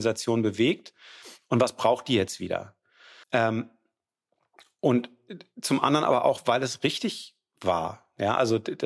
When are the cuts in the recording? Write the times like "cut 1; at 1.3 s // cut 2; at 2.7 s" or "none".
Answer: cut 1; at 3.2 s

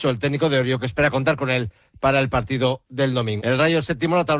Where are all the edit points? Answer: cut 1; at 3.4 s

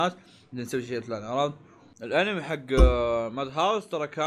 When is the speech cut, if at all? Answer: cut 1; at 1.9 s

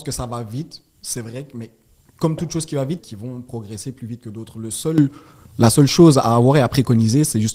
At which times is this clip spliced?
cut 1; at 3.0 s

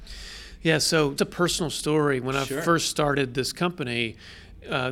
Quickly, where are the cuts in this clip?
cut 1; at 1.2 s

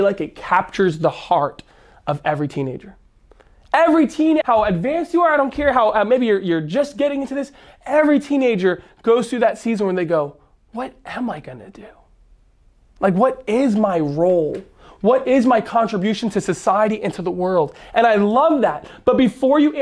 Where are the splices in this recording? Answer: cut 1; at 4.4 s

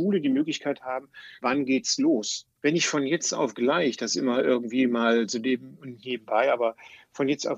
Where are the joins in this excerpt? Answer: cut 1; at 1.4 s // cut 2; at 2.6 s

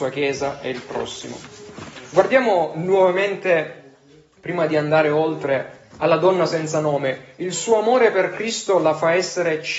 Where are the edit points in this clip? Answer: none

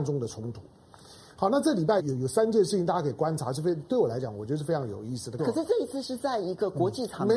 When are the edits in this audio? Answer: cut 1; at 2.0 s // cut 2; at 5.4 s

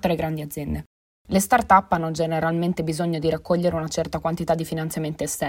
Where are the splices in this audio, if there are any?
cut 1; at 1.1 s

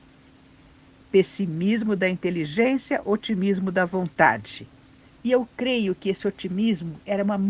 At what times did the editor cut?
cut 1; at 5.1 s

